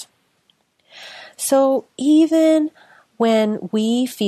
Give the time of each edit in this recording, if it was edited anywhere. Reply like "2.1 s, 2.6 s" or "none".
none

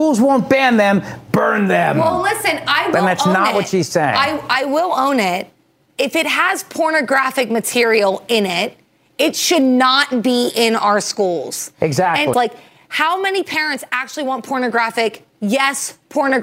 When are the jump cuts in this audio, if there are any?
12.3 s

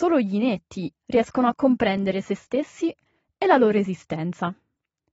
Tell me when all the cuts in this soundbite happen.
0.9 s

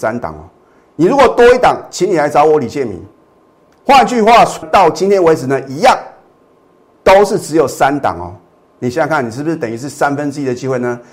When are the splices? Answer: 4.6 s, 8.7 s

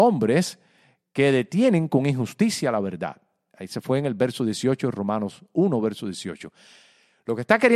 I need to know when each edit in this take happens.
none

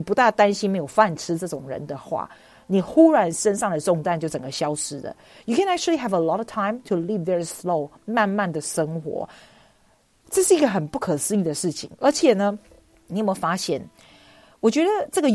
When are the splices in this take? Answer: 13.1 s

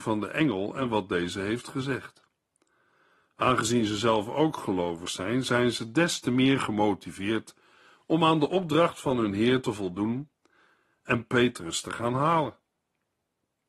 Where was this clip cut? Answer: none

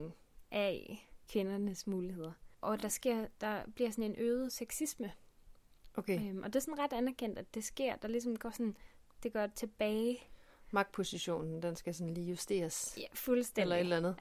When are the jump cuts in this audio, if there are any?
none

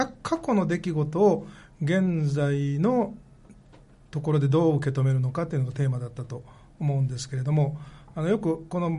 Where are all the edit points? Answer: none

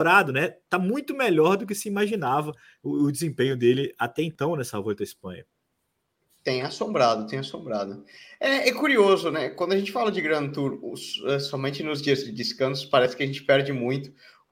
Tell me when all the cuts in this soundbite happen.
none

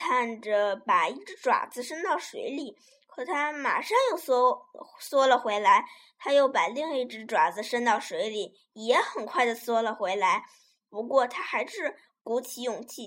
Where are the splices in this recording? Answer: none

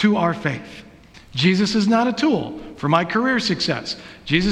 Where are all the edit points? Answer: 1.1 s

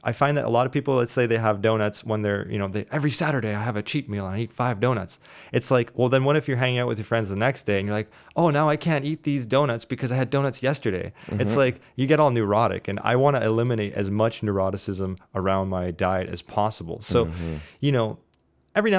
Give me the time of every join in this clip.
none

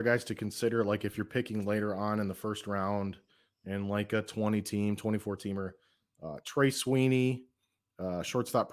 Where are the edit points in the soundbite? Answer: none

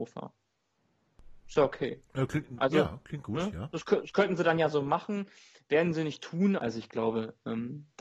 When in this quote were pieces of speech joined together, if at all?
6.6 s

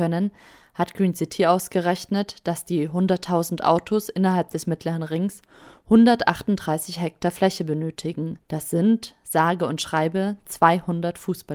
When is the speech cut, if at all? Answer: 8.4 s

